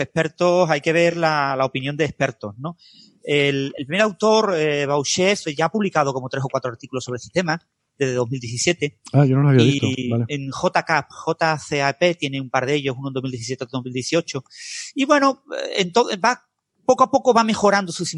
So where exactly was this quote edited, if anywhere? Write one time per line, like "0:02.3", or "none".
none